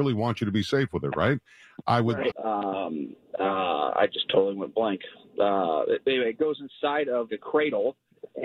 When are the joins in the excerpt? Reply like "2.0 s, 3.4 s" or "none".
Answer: 2.3 s, 7.3 s